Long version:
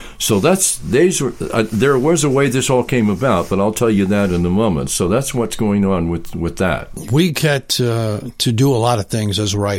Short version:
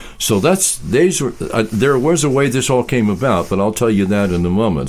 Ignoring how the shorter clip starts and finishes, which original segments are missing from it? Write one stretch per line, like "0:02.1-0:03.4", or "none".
none